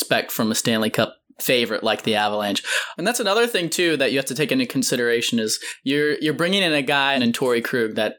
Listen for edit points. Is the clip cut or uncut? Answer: cut